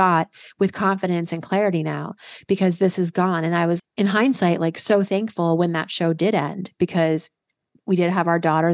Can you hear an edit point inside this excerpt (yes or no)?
yes